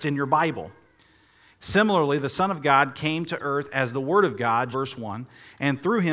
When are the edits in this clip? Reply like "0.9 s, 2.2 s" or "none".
1.5 s, 4.7 s